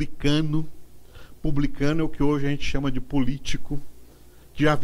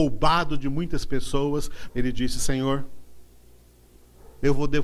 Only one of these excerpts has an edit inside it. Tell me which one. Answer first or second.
second